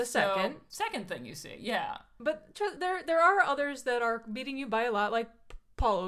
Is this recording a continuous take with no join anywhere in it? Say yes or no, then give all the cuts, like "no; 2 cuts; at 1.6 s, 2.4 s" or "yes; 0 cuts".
yes; 0 cuts